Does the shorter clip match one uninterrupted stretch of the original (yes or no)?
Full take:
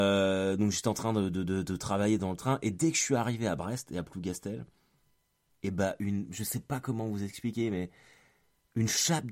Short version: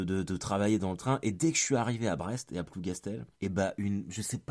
no